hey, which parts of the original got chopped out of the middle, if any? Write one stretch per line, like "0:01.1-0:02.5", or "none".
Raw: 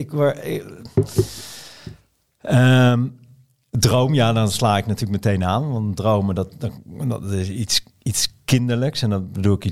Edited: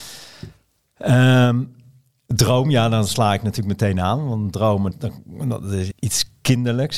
0:06.3-0:06.5
0:07.5-0:07.9